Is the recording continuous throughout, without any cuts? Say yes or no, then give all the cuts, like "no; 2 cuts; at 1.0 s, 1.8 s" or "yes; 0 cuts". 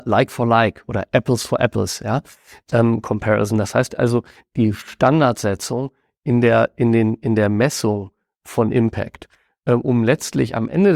yes; 0 cuts